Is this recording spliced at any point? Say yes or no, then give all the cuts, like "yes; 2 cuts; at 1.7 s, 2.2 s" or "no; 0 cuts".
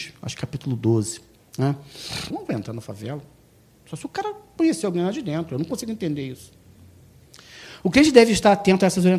yes; 1 cut; at 2.3 s